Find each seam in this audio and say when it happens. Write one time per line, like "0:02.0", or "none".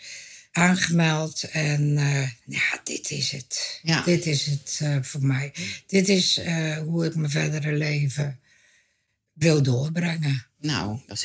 none